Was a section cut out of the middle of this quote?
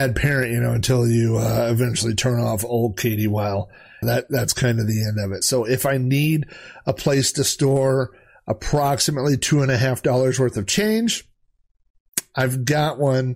yes; 2 cuts; at 4.0 s, 5.4 s

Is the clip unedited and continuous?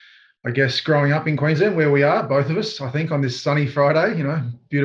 yes; 0 cuts

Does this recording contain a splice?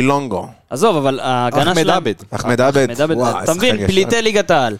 no; 0 cuts

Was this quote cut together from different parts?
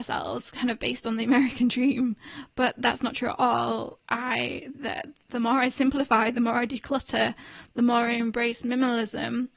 no; 0 cuts

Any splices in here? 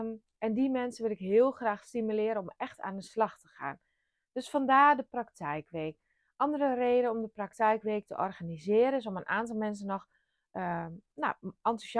no; 0 cuts

